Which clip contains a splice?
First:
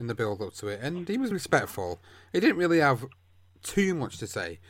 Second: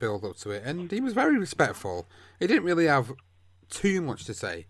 first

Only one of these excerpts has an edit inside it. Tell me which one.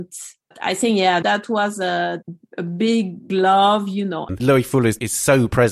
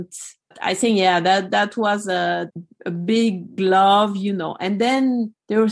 first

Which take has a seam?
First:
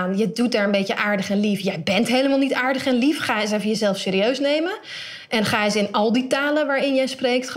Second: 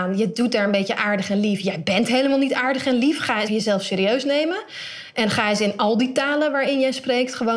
second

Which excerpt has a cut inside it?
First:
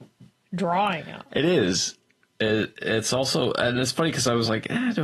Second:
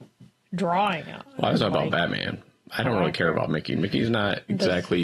first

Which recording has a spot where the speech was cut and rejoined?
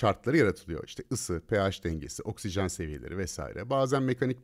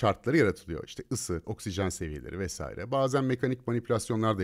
second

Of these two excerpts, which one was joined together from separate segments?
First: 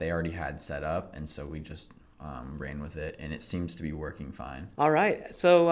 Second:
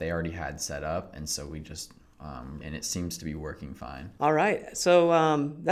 second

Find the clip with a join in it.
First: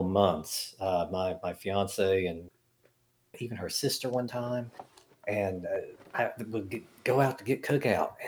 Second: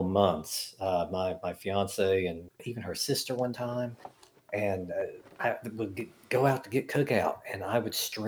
second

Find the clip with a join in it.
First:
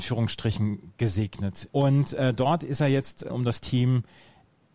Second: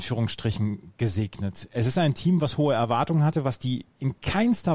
first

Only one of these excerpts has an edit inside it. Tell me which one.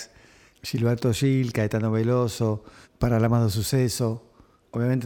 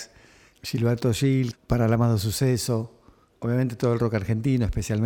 second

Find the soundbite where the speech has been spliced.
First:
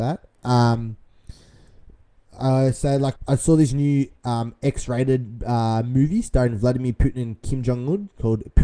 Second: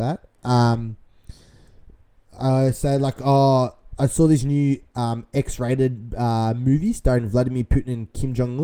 first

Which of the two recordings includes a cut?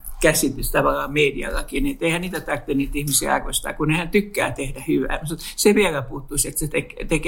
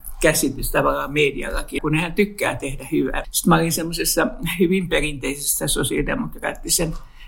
second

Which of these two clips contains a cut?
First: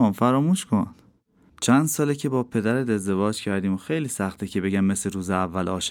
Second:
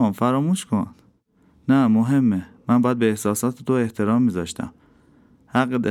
first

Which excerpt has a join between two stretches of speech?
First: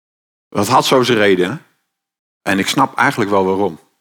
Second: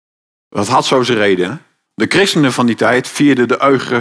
second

